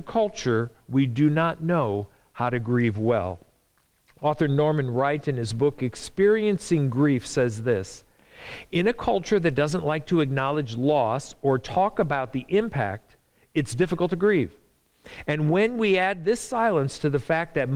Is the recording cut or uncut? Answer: uncut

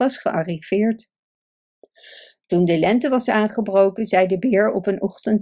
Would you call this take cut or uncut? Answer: uncut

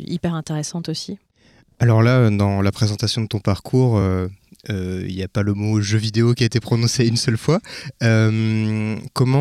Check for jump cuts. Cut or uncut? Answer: uncut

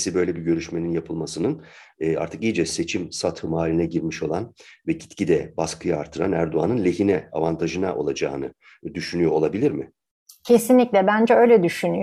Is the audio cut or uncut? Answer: uncut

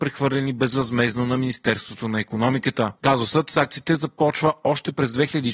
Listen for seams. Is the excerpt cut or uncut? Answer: uncut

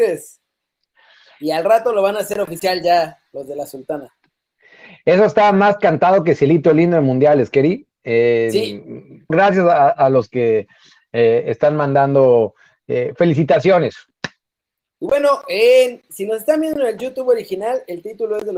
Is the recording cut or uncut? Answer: cut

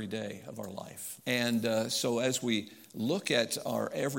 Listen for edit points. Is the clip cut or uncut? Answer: cut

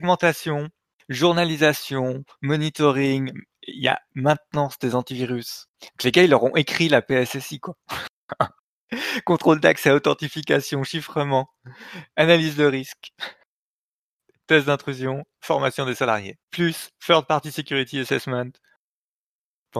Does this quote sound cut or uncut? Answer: cut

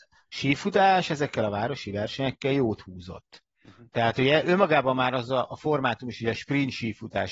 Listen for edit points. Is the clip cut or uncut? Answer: uncut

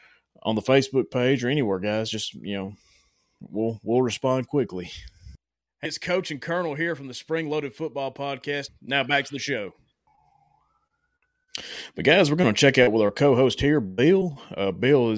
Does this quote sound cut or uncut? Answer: cut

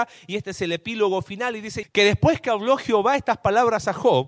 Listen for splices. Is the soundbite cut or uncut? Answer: cut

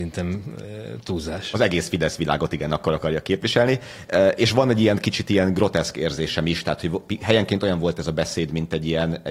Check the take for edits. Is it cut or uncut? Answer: uncut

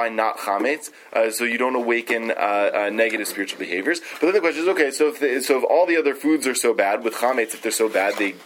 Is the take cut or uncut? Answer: uncut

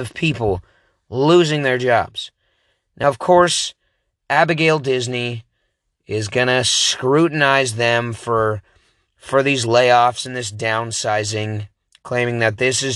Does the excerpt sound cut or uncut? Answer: uncut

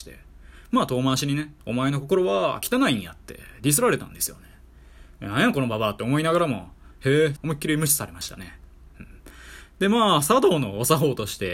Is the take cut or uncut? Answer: cut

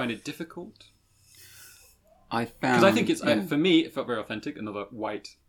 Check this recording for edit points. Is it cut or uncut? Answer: uncut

